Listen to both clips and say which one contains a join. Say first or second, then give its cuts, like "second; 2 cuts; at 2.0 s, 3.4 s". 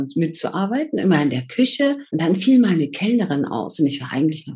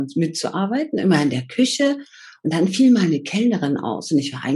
first; 1 cut; at 2.1 s